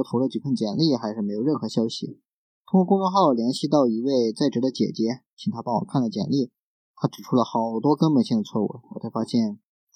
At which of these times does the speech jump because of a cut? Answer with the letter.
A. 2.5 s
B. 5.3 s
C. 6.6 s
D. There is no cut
D